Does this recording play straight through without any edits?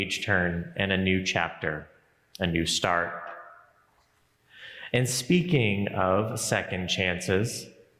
yes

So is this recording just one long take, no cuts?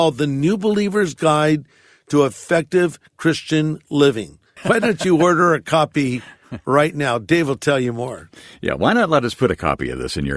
no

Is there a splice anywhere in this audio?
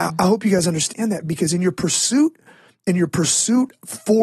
no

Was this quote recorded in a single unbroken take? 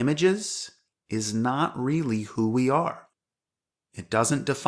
yes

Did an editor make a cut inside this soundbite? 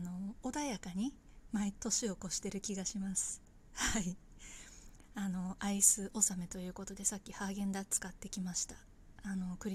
yes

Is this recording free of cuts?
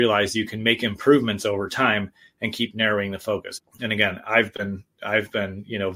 no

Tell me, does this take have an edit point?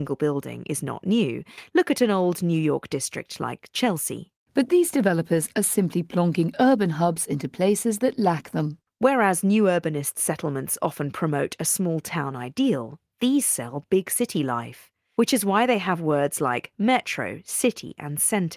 no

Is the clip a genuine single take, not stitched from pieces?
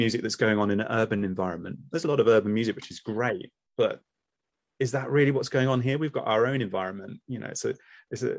yes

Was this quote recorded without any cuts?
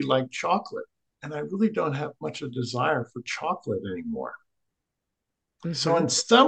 no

